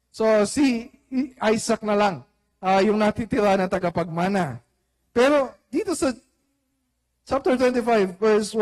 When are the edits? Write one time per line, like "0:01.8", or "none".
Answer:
none